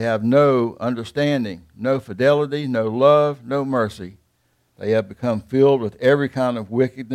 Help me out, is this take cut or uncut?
cut